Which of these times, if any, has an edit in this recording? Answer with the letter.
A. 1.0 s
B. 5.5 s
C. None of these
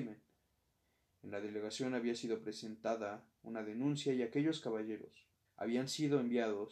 B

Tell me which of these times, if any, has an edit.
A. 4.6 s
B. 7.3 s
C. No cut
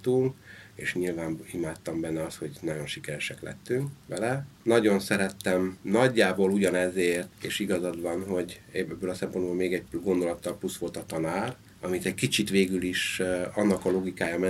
C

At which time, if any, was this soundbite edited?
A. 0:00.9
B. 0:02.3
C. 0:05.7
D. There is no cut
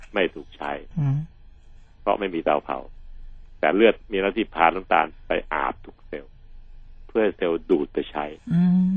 A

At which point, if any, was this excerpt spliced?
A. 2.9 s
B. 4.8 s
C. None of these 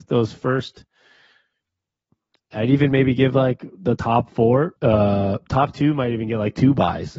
B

